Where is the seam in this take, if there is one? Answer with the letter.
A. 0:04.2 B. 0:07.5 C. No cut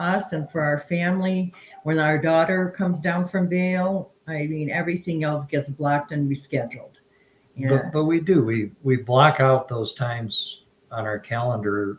C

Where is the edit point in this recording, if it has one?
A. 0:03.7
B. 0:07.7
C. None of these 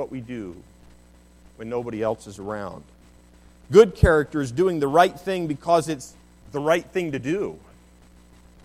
C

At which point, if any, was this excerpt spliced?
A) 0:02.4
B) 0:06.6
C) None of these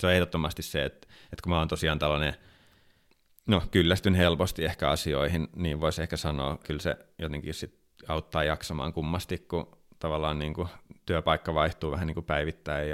B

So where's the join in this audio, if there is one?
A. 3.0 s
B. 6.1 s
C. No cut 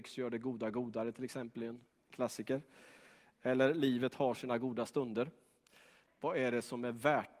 B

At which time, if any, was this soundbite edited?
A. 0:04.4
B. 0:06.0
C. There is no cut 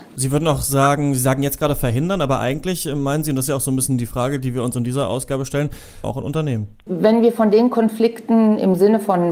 B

